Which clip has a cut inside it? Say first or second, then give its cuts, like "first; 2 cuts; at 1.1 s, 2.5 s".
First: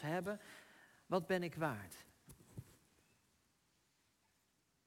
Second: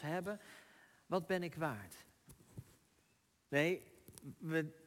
second; 1 cut; at 3.5 s